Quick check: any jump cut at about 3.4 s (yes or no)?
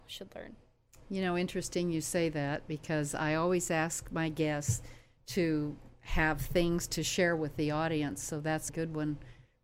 no